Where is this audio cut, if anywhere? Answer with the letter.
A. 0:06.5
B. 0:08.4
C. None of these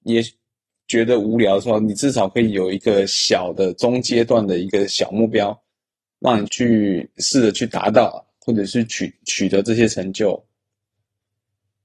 A